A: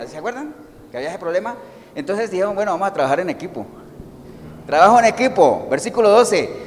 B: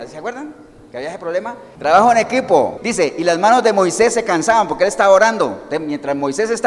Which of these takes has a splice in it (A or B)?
B